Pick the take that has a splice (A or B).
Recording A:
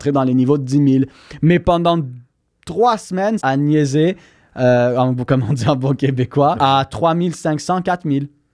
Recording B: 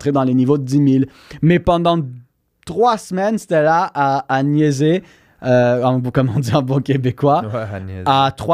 A